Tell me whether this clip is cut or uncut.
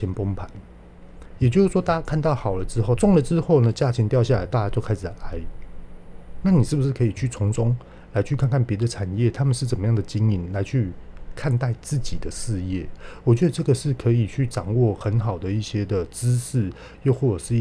cut